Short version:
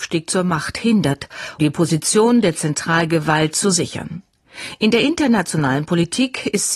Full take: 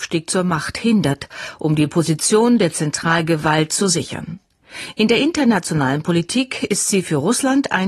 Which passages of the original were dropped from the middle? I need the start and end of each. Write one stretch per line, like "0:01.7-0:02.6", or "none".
0:01.6-0:01.8

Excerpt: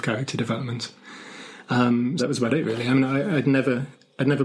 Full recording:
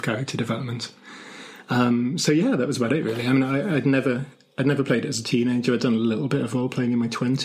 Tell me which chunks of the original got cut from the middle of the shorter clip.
0:02.2-0:02.6

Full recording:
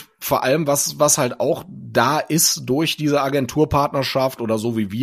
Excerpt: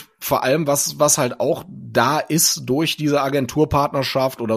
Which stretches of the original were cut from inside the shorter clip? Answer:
none

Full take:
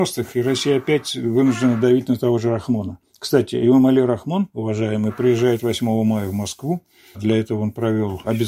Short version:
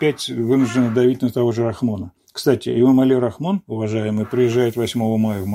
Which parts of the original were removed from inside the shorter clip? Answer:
none

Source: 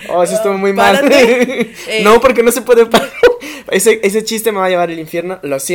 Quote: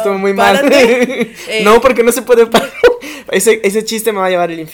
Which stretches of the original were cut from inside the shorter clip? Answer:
none

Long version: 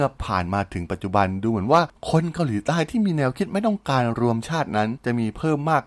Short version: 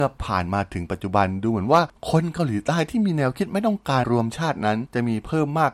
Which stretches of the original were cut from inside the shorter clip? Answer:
0:04.0-0:04.1

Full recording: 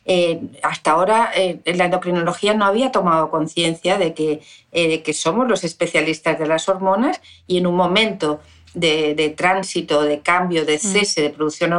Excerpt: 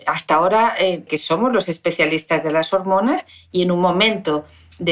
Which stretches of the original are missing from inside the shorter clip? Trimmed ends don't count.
0:01.6-0:05.0

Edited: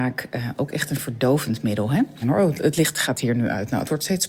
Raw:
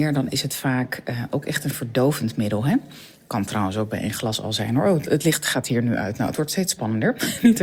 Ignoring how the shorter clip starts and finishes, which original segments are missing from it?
0:02.9-0:04.7

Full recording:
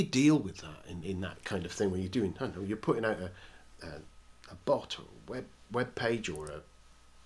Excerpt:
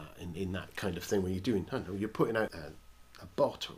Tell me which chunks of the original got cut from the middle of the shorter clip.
0:03.2-0:03.8

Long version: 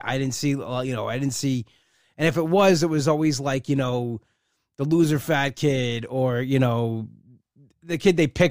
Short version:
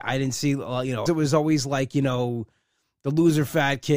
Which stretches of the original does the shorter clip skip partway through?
0:01.1-0:02.8

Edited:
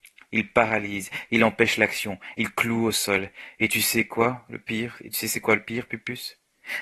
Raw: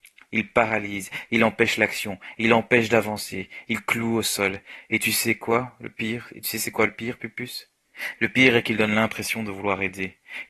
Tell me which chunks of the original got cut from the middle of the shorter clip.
0:02.4-0:03.7

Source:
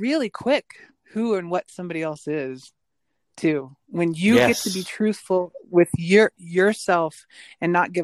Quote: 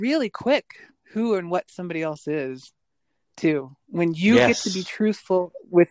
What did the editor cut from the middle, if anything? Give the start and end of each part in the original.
none

